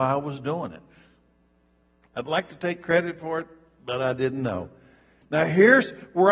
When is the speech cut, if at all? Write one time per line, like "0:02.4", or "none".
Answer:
0:05.2